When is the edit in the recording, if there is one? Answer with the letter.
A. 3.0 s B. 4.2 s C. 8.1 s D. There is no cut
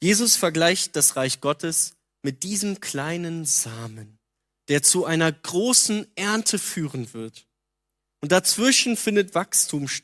D